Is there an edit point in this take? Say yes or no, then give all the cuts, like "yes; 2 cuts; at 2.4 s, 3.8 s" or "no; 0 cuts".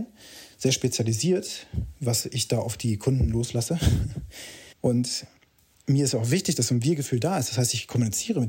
yes; 1 cut; at 4.7 s